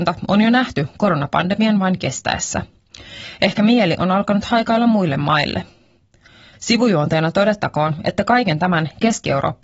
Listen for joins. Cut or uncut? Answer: cut